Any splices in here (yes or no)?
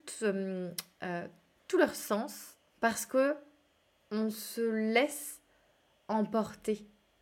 yes